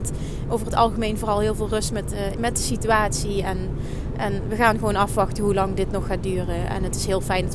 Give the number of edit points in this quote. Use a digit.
1